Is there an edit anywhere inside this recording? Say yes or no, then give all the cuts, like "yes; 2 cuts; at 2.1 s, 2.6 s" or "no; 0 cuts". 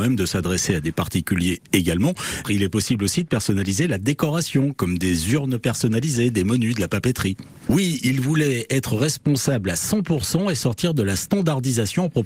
yes; 2 cuts; at 2.4 s, 7.7 s